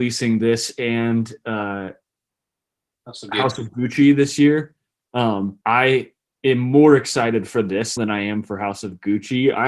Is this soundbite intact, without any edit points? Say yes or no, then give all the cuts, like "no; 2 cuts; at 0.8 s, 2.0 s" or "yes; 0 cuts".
no; 2 cuts; at 5.6 s, 8.0 s